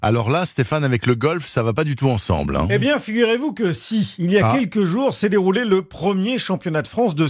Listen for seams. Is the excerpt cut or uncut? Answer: uncut